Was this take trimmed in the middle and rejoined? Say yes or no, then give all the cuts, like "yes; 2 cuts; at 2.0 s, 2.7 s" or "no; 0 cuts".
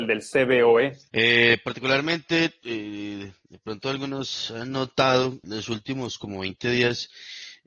yes; 2 cuts; at 1.1 s, 5.4 s